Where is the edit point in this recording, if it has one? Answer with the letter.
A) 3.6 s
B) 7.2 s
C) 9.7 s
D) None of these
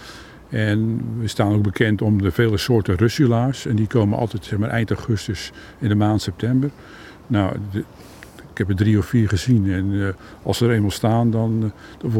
D